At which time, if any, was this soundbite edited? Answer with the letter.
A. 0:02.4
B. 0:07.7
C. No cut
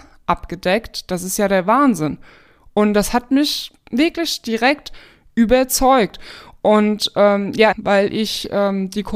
B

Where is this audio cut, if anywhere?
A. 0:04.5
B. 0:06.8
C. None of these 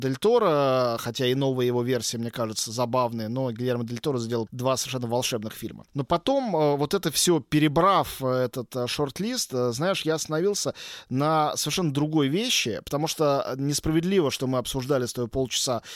A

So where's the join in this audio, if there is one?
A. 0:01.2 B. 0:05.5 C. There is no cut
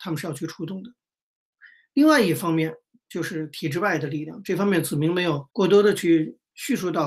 B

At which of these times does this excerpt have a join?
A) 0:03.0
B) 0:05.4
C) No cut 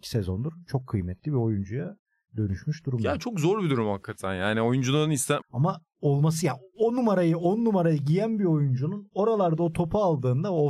B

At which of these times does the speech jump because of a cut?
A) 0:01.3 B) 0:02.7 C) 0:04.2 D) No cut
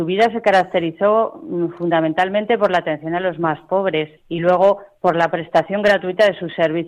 C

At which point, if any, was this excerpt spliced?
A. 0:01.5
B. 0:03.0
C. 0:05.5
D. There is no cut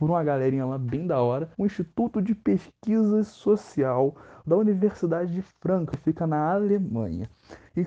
A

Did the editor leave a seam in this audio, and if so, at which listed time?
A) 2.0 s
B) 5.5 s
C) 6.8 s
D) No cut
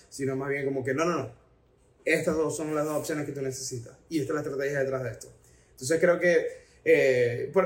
D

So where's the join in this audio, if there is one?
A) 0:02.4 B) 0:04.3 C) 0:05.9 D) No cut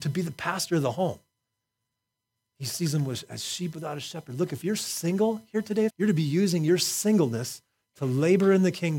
C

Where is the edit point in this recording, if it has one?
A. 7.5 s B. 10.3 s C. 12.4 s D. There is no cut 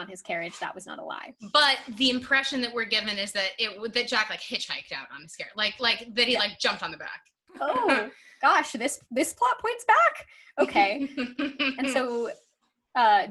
A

